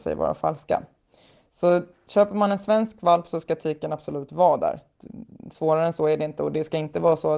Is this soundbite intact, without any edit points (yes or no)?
yes